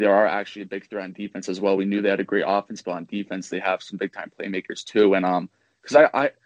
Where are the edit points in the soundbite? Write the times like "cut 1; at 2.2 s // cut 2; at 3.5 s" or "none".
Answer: none

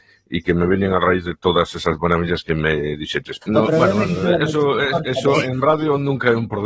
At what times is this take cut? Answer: cut 1; at 3.4 s

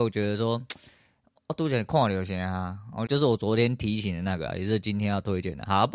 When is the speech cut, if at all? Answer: cut 1; at 3.1 s

